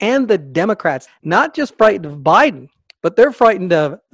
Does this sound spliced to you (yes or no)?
yes